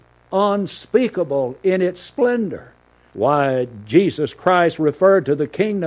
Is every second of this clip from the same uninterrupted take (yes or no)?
no